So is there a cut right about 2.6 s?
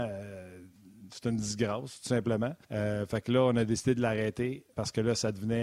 yes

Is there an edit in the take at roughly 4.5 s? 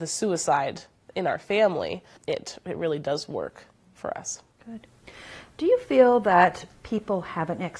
yes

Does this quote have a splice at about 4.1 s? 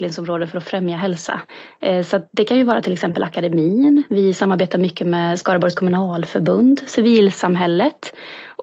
no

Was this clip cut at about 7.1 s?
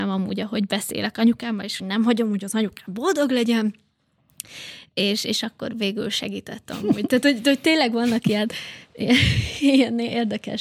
no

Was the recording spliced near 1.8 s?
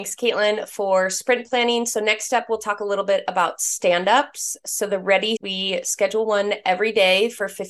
no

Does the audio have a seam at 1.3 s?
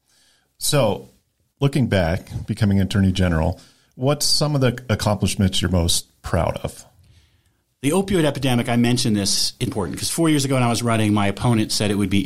no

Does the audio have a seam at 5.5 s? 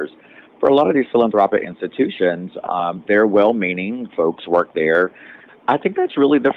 yes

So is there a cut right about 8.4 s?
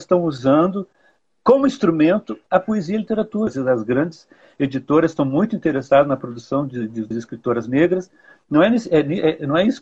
no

